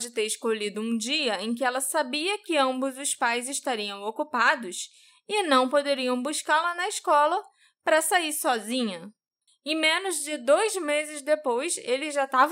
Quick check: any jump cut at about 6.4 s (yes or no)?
no